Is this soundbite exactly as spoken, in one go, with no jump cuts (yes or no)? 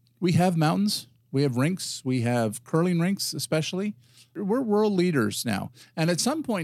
yes